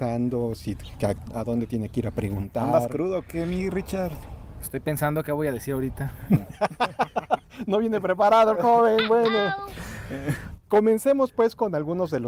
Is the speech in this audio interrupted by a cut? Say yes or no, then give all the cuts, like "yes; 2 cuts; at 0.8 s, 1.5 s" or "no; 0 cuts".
no; 0 cuts